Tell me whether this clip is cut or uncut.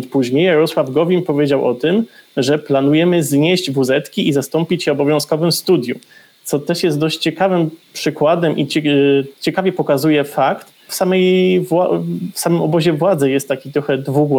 cut